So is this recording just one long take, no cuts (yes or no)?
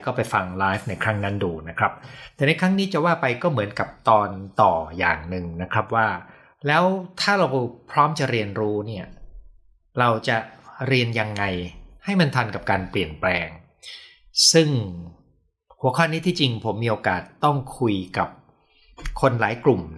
yes